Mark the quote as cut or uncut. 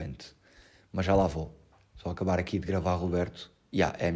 uncut